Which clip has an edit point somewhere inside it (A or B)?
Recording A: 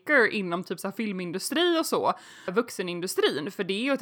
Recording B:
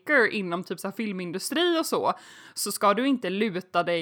A